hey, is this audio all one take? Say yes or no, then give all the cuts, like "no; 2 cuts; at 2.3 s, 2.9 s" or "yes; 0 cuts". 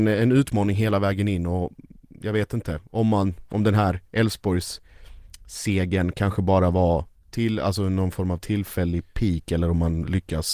yes; 0 cuts